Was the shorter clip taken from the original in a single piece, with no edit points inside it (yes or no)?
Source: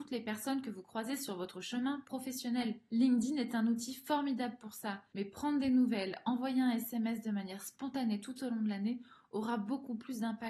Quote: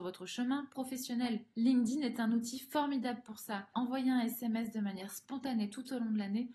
no